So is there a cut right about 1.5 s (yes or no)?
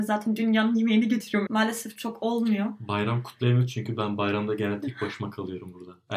yes